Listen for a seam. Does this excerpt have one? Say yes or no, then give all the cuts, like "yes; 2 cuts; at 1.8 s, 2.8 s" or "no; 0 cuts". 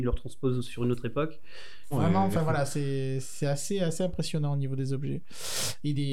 yes; 1 cut; at 1.9 s